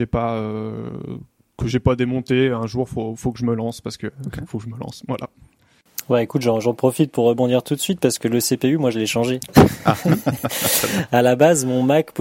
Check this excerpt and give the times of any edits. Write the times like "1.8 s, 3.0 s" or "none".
none